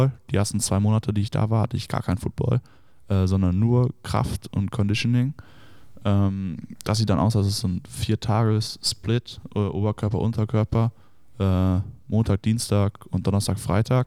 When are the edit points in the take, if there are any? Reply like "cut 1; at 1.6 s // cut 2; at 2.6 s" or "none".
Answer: none